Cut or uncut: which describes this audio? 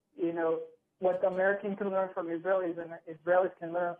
uncut